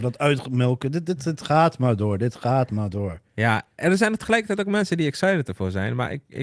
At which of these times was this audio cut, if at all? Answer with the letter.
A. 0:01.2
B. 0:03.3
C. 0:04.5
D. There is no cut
D